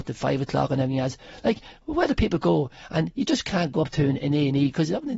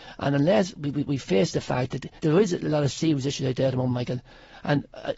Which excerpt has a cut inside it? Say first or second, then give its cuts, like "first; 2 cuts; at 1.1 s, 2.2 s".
second; 1 cut; at 2.2 s